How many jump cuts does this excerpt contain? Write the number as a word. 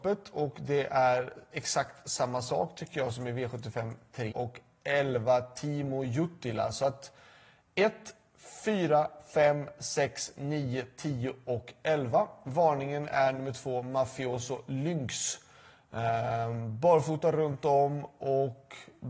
one